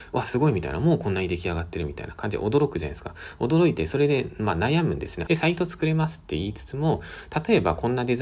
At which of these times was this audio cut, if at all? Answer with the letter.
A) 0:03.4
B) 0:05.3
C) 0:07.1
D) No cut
B